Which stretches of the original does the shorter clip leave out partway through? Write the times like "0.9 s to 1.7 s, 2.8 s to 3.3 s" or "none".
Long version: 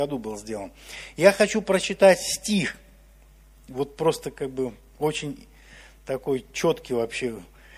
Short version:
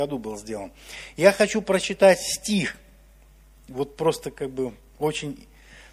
none